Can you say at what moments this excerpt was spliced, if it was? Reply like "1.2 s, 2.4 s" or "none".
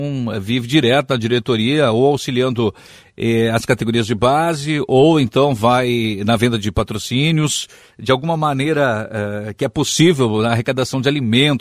none